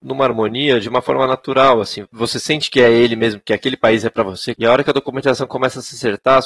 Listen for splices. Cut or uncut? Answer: cut